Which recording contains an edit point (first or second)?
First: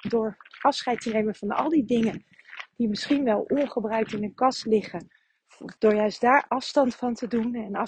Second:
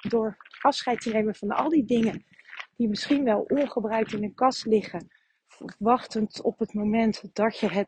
first